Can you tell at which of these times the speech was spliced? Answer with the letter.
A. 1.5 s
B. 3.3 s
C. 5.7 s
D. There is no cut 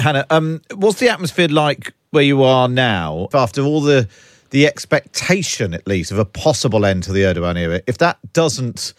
B